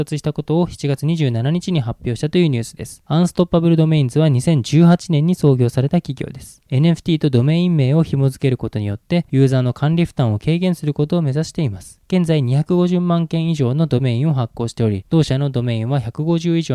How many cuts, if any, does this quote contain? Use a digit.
1